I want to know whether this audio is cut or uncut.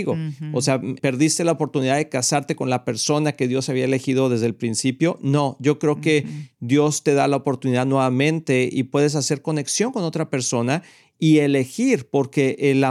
cut